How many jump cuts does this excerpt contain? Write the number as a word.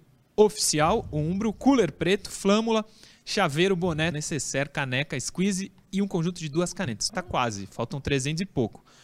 two